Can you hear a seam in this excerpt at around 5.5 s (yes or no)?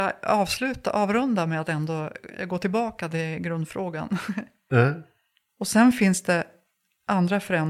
yes